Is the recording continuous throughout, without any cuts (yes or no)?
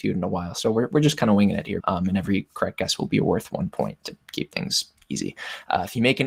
no